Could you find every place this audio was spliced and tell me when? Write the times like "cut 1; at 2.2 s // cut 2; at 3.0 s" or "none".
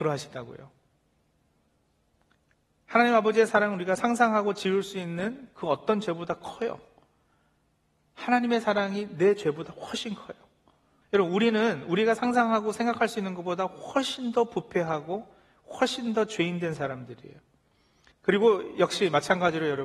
cut 1; at 11.0 s // cut 2; at 18.1 s

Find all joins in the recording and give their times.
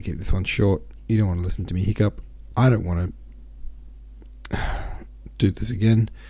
none

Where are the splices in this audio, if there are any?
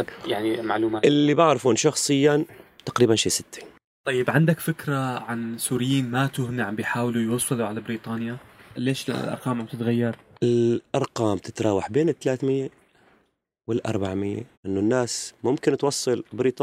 cut 1; at 8.8 s // cut 2; at 14.5 s

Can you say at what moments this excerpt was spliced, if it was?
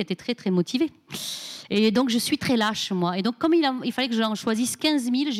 cut 1; at 2.4 s

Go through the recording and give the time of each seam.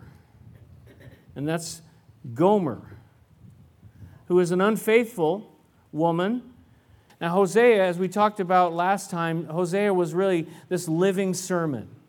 cut 1; at 7.1 s

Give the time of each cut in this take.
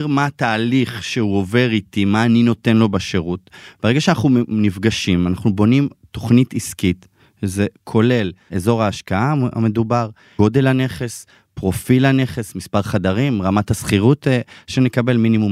none

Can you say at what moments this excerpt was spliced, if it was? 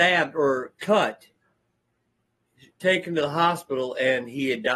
none

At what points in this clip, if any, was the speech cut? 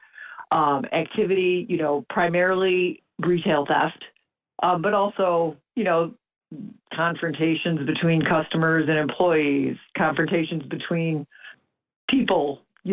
none

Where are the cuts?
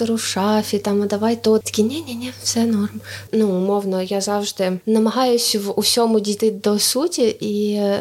cut 1; at 1.6 s // cut 2; at 3.3 s

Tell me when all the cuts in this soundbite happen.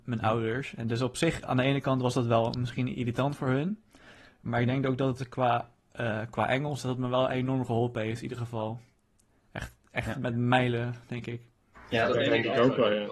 none

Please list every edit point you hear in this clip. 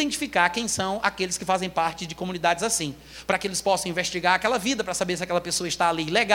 none

